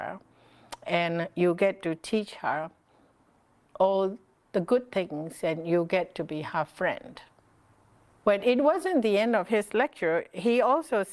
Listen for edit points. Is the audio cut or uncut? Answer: cut